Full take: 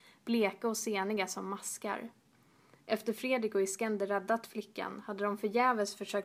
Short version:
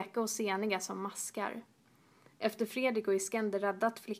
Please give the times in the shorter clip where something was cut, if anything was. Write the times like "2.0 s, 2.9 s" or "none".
none